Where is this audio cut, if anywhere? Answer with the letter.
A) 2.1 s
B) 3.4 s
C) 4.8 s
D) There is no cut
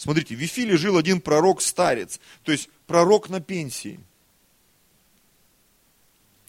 D